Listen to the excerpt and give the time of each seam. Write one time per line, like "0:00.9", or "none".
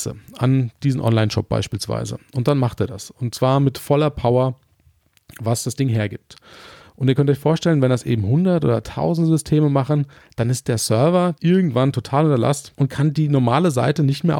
0:11.4
0:12.7